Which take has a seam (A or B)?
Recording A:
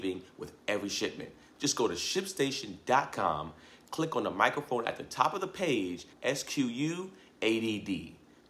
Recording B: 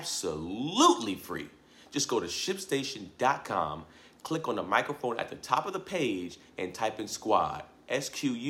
A